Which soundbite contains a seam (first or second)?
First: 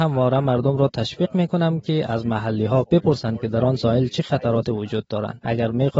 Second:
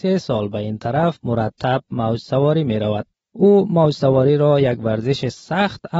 first